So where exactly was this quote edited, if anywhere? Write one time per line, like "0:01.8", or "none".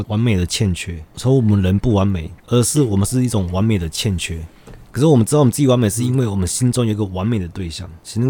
0:02.4